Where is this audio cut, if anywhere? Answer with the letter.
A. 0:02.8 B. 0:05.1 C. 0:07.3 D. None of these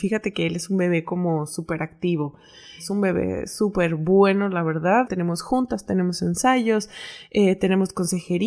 B